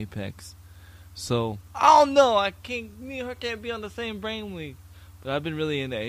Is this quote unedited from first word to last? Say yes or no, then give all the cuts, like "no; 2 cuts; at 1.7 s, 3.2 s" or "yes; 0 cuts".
yes; 0 cuts